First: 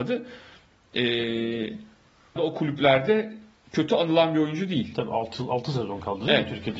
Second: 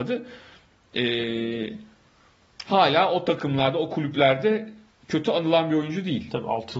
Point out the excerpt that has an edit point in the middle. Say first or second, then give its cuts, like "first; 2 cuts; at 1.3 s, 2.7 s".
first; 1 cut; at 2.4 s